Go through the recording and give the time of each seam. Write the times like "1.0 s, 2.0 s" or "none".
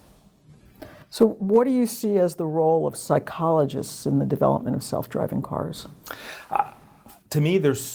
none